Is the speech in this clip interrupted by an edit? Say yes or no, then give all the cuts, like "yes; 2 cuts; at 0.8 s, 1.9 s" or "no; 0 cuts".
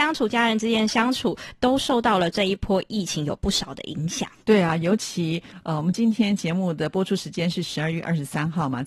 no; 0 cuts